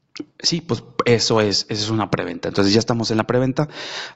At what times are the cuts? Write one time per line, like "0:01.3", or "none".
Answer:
none